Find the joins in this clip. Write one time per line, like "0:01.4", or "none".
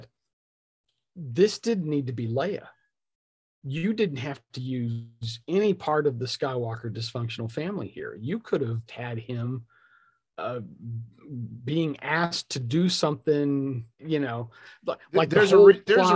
0:08.9
0:14.0